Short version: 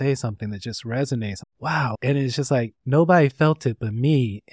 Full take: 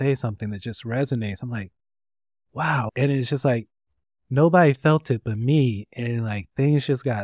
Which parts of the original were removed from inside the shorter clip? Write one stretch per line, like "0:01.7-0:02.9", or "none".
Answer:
0:01.4-0:02.4
0:03.7-0:04.2